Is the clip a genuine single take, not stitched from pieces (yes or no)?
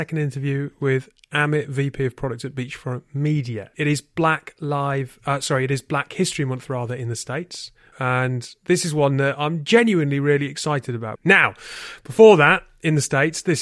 no